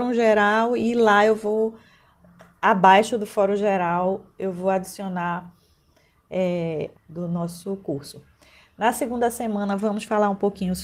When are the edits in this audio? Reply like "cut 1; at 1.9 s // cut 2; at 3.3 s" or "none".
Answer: cut 1; at 6.9 s